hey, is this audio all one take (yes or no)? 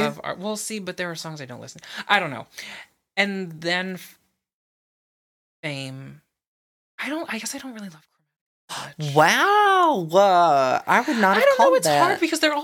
yes